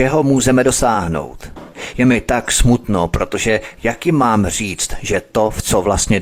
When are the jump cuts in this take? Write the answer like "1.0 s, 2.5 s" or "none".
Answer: none